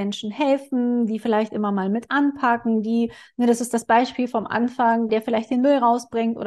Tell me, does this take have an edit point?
yes; 1 cut; at 5.1 s

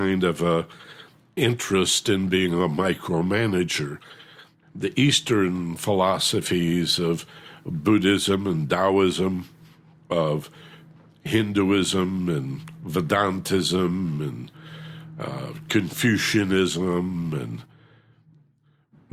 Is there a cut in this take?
no; 0 cuts

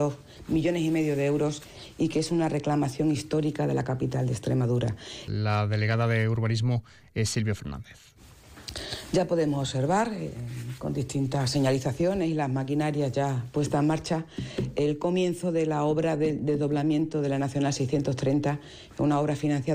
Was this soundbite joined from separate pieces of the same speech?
yes; 1 cut; at 5.3 s

